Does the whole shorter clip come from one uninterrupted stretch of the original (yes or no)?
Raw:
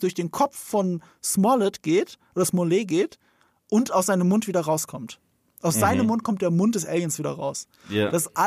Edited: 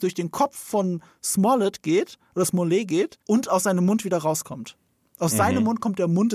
no